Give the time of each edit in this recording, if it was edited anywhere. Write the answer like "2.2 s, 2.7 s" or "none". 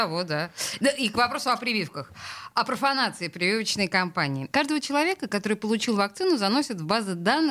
4.5 s